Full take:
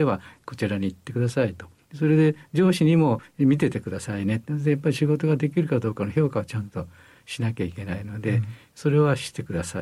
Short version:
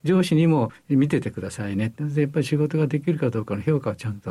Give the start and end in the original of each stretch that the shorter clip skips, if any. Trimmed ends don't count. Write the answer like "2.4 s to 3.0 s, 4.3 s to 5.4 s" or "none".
none